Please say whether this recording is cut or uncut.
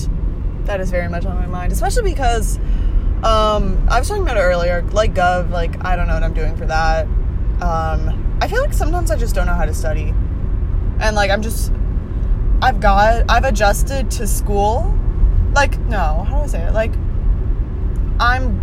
uncut